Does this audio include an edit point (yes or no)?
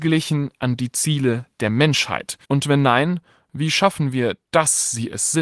yes